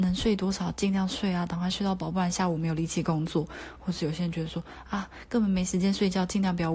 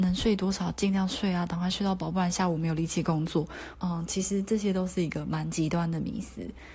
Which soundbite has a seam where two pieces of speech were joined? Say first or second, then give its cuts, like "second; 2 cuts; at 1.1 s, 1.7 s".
second; 1 cut; at 3.7 s